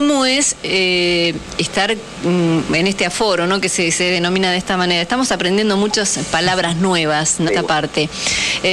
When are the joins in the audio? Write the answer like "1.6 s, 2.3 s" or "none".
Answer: 7.5 s